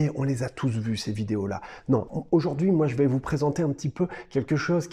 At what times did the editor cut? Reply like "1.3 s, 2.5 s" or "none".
2.1 s